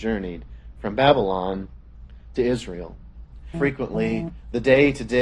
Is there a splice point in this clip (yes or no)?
yes